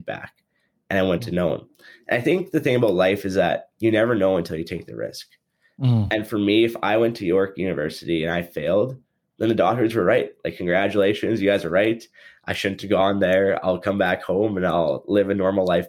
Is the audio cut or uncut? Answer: uncut